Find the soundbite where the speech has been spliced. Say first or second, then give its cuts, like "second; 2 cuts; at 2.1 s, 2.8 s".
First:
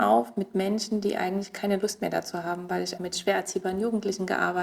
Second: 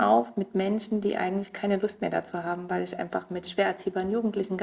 first; 1 cut; at 3.0 s